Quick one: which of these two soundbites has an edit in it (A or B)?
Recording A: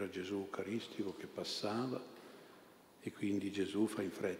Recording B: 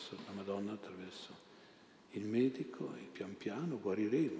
B